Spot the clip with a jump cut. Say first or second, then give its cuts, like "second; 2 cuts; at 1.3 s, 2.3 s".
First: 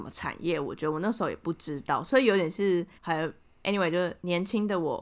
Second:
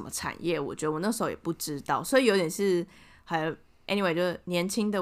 first; 1 cut; at 3.0 s